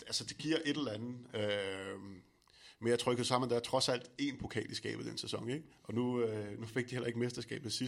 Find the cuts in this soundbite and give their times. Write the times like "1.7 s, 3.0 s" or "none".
none